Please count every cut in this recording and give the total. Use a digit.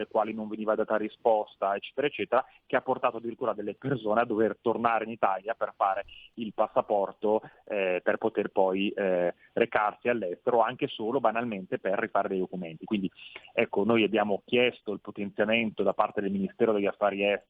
0